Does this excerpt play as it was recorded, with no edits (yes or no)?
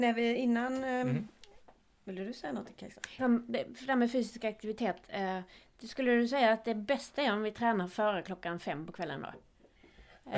no